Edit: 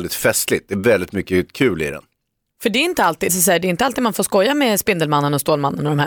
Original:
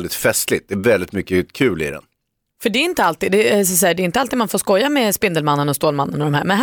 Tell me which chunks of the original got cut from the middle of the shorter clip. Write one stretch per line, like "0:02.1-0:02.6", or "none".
0:03.3-0:03.6